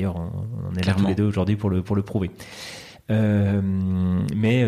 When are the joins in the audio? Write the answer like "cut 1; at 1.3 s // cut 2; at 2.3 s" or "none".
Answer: none